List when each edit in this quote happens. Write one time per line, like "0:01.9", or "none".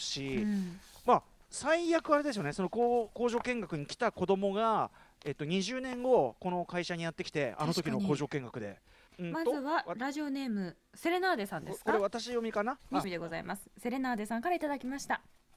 0:09.1
0:13.0